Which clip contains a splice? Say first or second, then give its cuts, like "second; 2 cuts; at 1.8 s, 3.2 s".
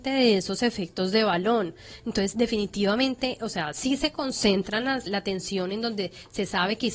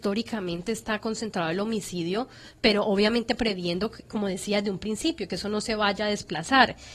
first; 1 cut; at 5.1 s